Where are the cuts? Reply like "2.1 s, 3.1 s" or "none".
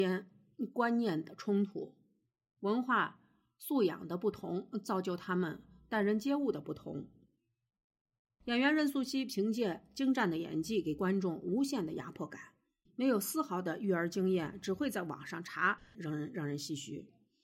12.8 s, 15.9 s